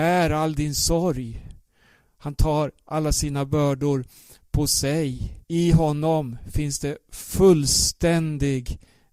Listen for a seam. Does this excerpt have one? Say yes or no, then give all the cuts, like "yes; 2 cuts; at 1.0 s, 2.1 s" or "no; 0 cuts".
yes; 1 cut; at 5.4 s